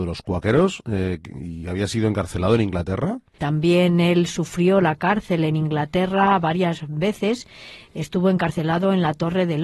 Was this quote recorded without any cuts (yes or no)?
no